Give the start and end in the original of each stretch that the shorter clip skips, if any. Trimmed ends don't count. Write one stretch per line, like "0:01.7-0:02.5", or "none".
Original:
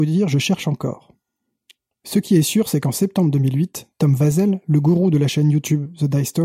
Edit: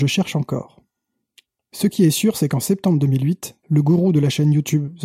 0:03.9-0:04.6